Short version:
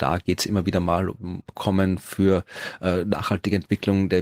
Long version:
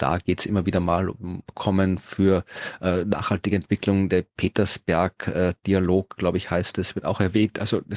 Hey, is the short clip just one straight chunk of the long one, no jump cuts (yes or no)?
yes